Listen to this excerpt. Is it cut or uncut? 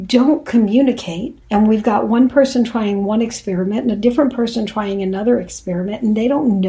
cut